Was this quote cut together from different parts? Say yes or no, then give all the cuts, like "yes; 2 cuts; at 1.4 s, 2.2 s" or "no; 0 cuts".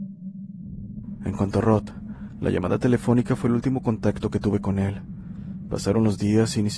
no; 0 cuts